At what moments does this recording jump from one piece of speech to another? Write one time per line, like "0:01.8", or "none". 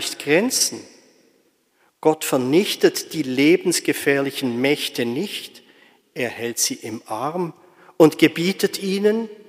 none

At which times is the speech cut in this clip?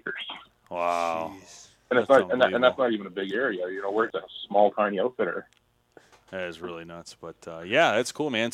0:04.1
0:06.1

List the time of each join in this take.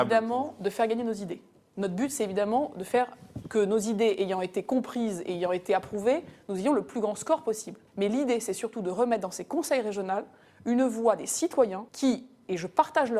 0:03.4
0:07.9
0:11.9

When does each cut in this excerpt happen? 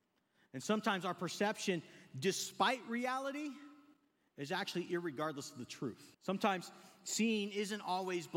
0:06.1

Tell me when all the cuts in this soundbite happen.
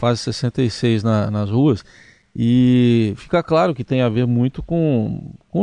none

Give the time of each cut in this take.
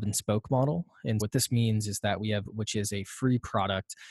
0:01.2
0:02.4

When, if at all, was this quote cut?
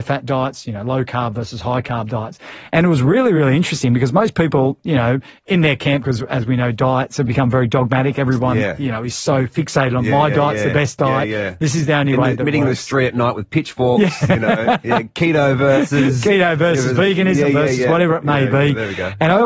none

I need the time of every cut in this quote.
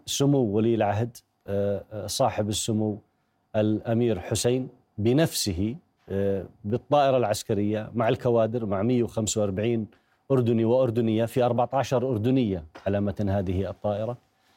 none

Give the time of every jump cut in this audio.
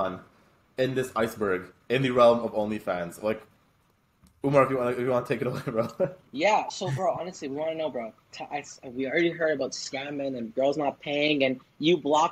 none

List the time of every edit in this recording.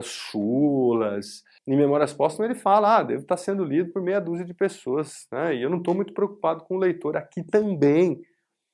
0:01.6

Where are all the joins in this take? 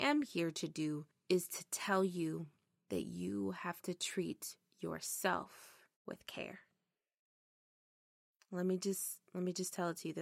0:05.9

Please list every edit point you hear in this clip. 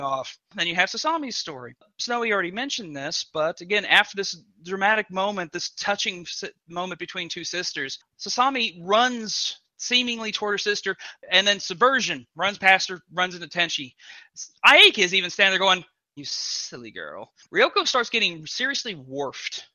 0:16.2
0:17.4

